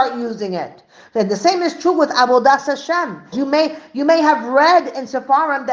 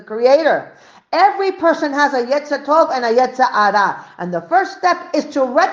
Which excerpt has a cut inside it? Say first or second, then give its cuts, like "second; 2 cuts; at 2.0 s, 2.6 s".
first; 1 cut; at 3.3 s